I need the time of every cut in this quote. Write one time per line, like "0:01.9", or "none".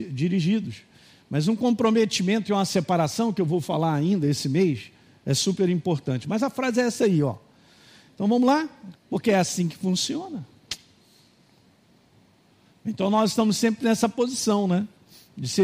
0:09.0